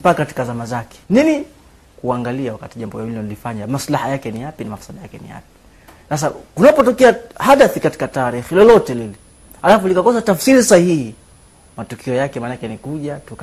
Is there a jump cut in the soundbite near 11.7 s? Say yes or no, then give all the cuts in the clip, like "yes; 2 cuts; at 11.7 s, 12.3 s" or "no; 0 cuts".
no; 1 cut; at 1.0 s